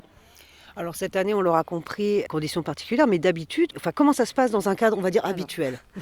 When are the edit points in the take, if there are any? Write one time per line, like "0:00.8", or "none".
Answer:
none